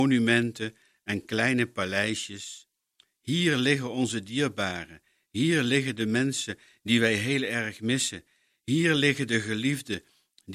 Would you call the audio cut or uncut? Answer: uncut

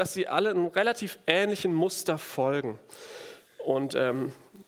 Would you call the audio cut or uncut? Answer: uncut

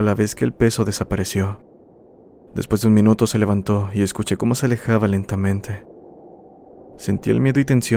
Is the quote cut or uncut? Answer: uncut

